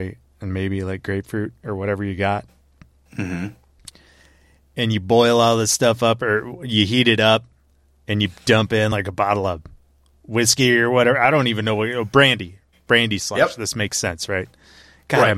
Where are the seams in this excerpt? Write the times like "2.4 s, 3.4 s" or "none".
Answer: none